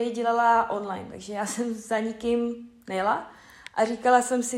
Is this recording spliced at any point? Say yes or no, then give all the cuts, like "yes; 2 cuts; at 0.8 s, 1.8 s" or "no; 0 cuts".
no; 0 cuts